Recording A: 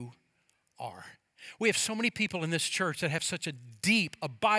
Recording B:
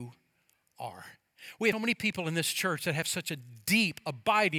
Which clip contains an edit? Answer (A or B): B